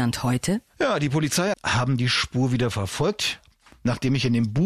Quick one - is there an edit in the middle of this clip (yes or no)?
yes